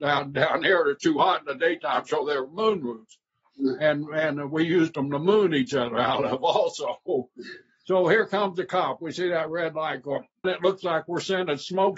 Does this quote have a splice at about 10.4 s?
yes; 1 cut; at 10.4 s

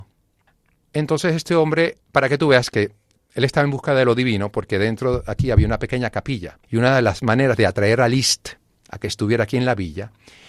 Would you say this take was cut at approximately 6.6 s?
yes; 2 cuts; at 2.0 s, 6.6 s

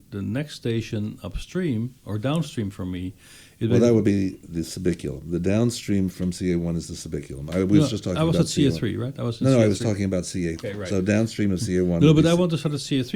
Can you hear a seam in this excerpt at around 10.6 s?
yes; 1 cut; at 10.6 s

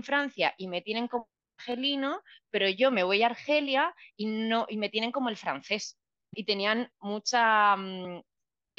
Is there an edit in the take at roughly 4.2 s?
no; 1 cut; at 6.3 s

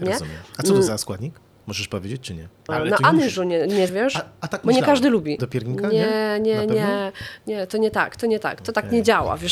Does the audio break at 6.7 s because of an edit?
no; 3 cuts; at 2.7 s, 3.9 s, 5.4 s

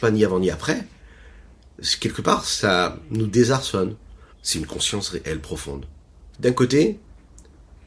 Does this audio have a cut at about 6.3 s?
yes; 2 cuts; at 4.3 s, 6.3 s

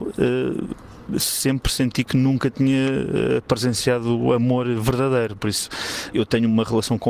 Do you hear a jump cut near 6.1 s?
yes; 1 cut; at 6.1 s

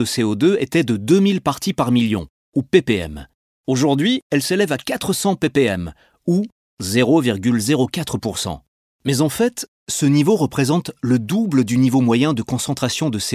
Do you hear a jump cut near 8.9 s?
yes; 1 cut; at 8.9 s

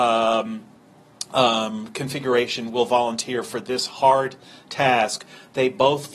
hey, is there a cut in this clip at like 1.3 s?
no; 0 cuts

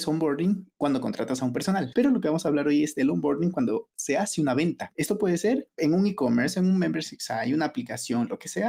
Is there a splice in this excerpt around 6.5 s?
no; 1 cut; at 1.9 s

